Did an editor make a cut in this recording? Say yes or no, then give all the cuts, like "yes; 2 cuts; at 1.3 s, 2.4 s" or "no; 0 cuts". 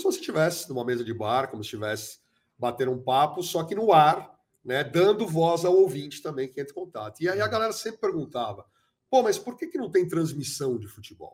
no; 0 cuts